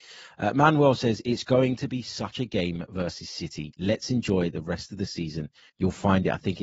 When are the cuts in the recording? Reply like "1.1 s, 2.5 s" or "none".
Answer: 5.7 s